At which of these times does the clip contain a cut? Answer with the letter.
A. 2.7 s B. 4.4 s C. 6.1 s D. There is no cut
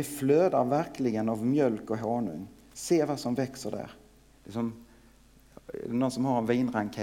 B